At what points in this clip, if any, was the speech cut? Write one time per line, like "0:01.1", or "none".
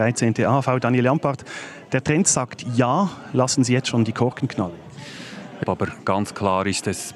0:05.6